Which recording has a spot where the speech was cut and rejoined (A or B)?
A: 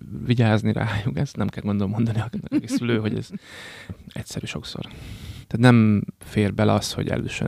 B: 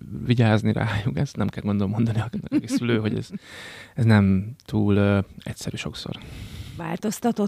A